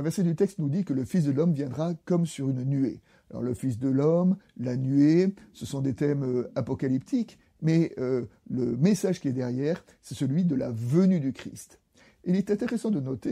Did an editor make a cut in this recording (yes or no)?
no